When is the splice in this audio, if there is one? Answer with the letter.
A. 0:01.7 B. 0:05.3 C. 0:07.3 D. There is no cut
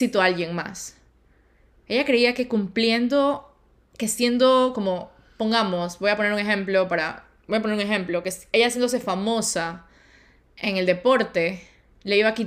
D